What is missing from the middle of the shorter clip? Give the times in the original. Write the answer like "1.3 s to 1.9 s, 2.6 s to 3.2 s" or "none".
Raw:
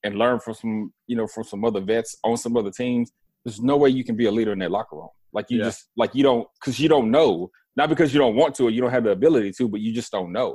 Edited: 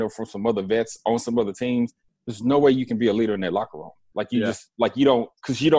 none